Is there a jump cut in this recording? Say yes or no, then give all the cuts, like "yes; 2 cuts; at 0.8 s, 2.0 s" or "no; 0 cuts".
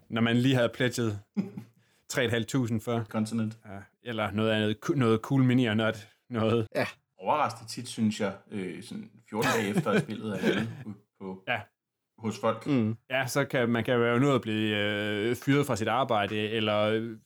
yes; 2 cuts; at 3.1 s, 6.7 s